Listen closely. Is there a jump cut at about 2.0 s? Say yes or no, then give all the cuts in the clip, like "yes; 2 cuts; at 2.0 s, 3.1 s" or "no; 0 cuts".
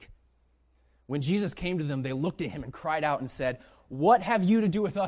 no; 0 cuts